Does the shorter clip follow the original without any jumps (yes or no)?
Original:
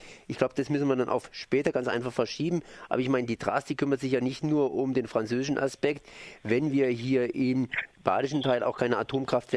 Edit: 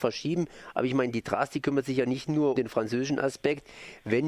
no